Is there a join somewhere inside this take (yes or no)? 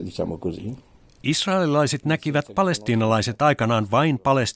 no